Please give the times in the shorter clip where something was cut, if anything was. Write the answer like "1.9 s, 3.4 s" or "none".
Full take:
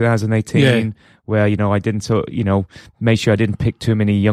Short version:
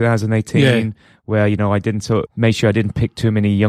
2.3 s